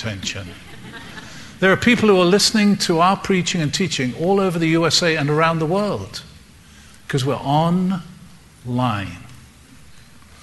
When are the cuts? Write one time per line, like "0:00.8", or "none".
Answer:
none

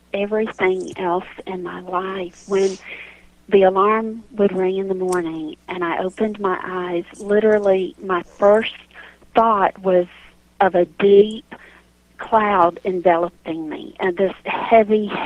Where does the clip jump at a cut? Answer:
none

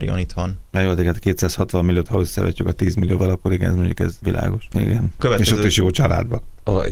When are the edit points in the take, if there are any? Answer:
0:02.1
0:04.7

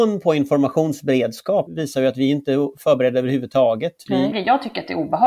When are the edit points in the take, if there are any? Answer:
0:01.7
0:04.3

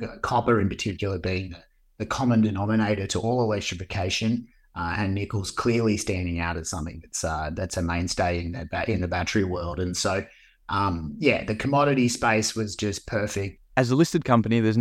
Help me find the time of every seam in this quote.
0:13.6

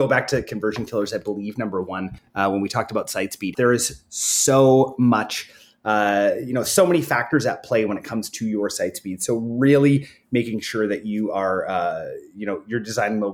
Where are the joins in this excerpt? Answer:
0:03.5

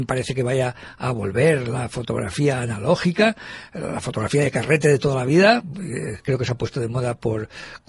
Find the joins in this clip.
none

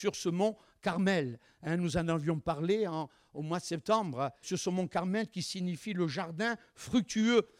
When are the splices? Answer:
0:04.4

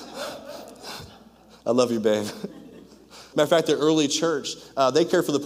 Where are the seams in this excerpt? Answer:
0:03.3

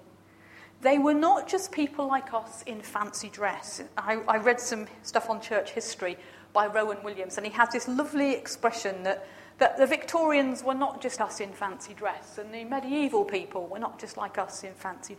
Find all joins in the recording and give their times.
0:11.2

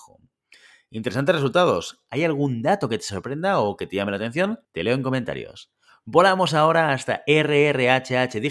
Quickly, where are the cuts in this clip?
0:04.6

